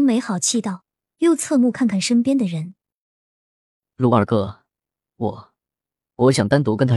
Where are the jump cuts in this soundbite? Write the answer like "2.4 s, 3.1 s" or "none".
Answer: none